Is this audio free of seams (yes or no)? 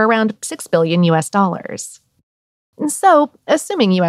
no